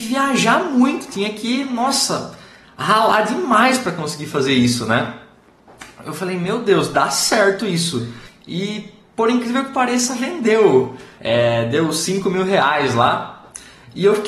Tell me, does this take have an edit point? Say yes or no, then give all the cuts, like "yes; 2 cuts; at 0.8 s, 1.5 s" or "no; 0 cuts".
yes; 2 cuts; at 8.2 s, 11.2 s